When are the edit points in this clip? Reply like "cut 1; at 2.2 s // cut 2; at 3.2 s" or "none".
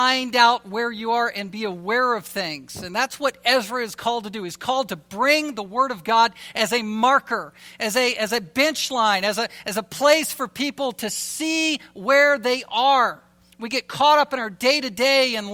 none